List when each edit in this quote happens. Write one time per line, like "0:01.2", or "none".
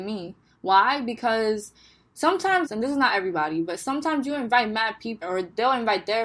0:02.7
0:05.2